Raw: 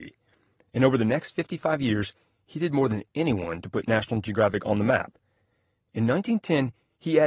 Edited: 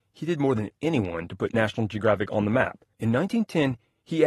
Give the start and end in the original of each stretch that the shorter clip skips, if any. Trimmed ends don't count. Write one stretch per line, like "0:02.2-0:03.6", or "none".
0:05.3-0:05.9